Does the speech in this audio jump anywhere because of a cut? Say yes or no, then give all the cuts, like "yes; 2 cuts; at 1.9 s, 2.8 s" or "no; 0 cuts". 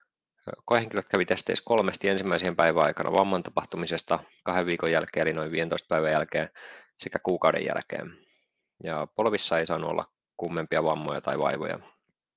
no; 0 cuts